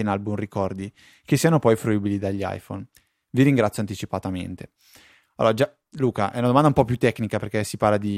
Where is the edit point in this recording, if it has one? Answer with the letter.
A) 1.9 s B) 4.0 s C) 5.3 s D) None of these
D